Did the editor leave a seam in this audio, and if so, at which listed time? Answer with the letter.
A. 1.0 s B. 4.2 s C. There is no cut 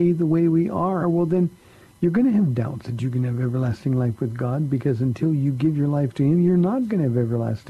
A